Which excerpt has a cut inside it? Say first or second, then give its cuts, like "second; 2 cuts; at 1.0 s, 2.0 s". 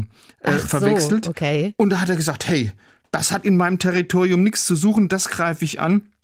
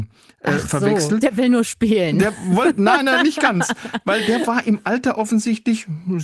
second; 1 cut; at 1.2 s